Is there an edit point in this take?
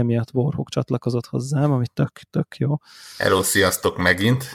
no; 0 cuts

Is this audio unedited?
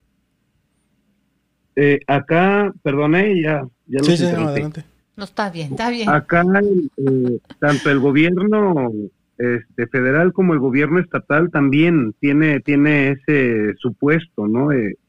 yes; 0 cuts

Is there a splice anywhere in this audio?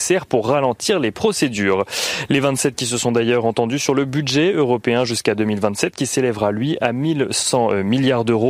no; 0 cuts

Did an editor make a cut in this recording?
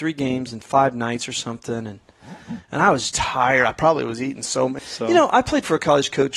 yes; 2 cuts; at 3.1 s, 4.8 s

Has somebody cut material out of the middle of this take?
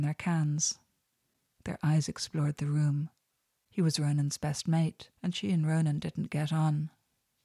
yes; 2 cuts; at 3.6 s, 5.2 s

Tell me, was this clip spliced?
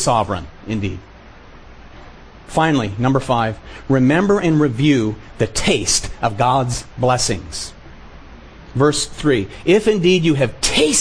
yes; 1 cut; at 2.5 s

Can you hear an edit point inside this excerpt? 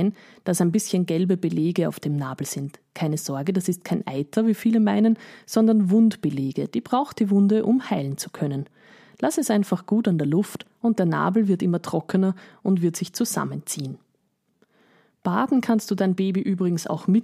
no; 0 cuts

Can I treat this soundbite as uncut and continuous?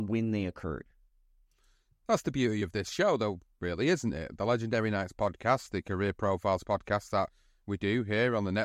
yes; 0 cuts

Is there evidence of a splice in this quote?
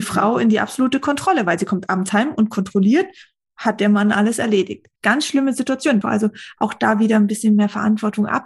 yes; 2 cuts; at 5.0 s, 6.0 s

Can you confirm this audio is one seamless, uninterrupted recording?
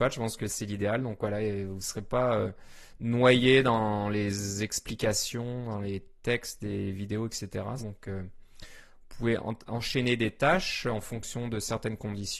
no; 1 cut; at 7.8 s

